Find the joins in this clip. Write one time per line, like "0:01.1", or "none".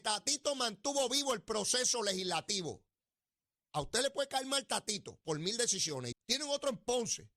0:03.6
0:06.1